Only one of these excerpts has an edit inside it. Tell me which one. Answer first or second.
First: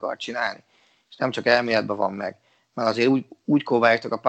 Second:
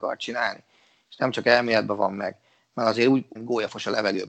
second